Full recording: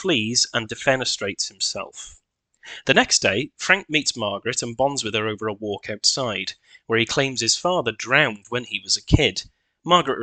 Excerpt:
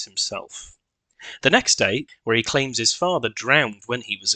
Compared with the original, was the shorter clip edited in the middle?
yes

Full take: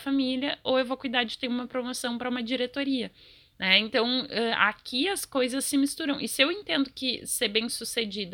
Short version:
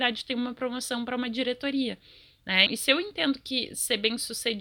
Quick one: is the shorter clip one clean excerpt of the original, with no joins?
no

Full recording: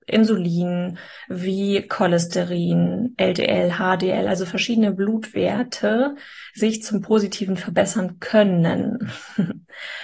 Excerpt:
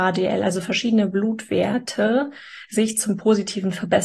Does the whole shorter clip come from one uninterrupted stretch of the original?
yes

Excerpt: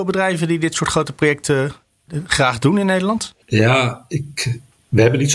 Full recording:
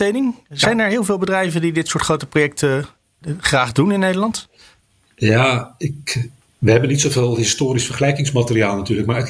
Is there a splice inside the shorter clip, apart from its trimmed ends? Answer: yes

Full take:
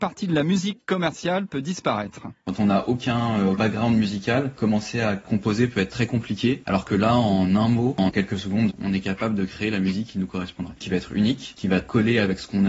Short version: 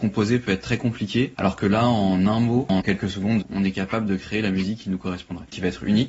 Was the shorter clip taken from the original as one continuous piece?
yes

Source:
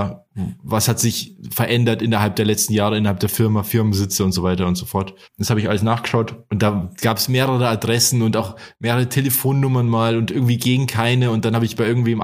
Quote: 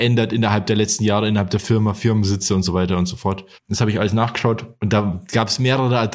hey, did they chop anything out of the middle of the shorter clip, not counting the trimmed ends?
no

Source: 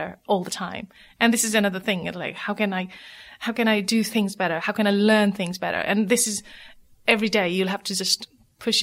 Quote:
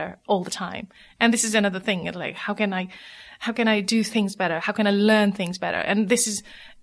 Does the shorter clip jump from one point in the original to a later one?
no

